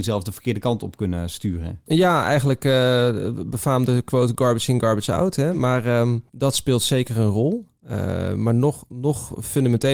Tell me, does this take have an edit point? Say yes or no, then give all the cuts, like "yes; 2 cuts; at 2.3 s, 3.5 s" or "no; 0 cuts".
no; 0 cuts